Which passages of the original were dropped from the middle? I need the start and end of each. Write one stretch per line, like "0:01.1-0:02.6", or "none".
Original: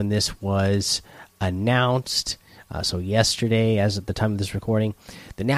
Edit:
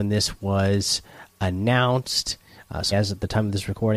0:02.9-0:03.8